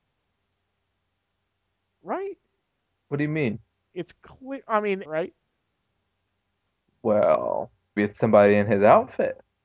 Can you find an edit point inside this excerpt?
yes; 3 cuts; at 3.9 s, 5.0 s, 8.0 s

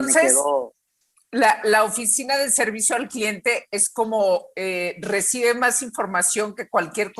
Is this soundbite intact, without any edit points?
no; 1 cut; at 1.6 s

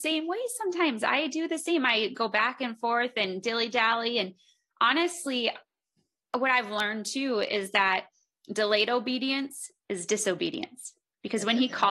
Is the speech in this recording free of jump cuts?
yes; 0 cuts

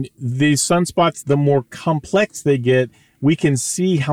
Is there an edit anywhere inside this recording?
yes; 1 cut; at 1.2 s

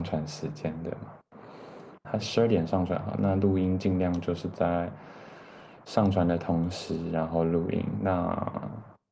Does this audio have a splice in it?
yes; 1 cut; at 2.0 s

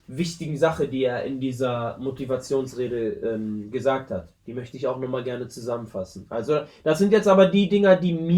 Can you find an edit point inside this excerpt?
no; 0 cuts

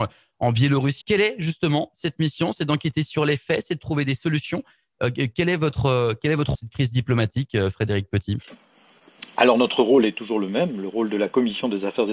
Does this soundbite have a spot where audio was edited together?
yes; 2 cuts; at 1.0 s, 6.5 s

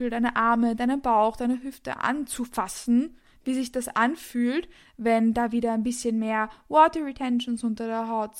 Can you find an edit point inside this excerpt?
no; 0 cuts

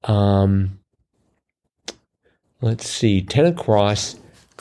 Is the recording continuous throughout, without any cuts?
yes; 0 cuts

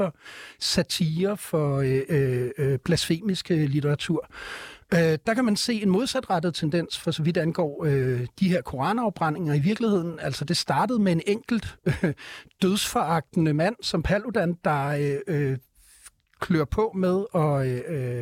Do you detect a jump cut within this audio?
no; 0 cuts

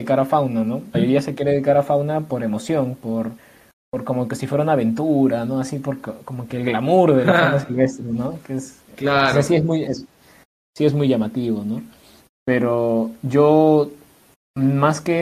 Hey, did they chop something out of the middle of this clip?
yes; 1 cut; at 0.9 s

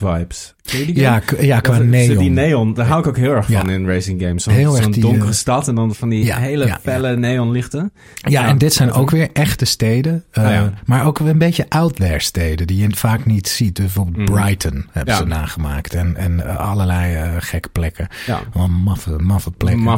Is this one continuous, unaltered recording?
yes; 0 cuts

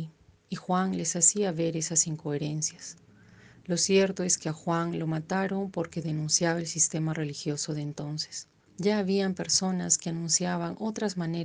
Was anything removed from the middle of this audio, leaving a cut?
yes; 1 cut; at 8.7 s

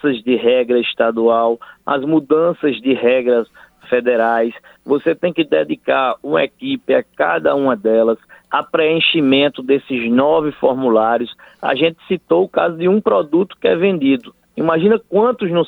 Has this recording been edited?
no; 0 cuts

